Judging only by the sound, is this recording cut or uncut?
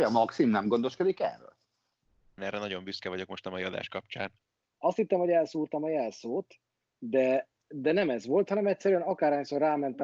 cut